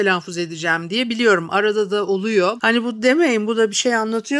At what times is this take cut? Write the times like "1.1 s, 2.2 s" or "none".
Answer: 2.6 s